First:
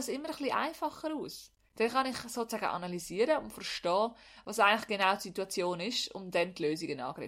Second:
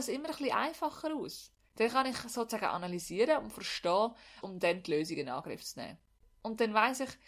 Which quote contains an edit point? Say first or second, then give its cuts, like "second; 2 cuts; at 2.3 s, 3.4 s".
second; 1 cut; at 4.4 s